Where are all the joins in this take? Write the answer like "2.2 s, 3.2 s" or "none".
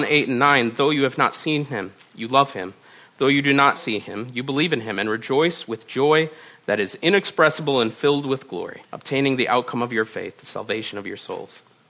3.8 s, 8.8 s